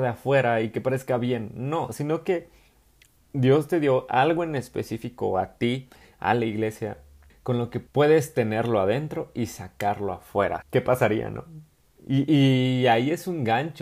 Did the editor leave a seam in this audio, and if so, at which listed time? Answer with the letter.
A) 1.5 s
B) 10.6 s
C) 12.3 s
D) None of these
B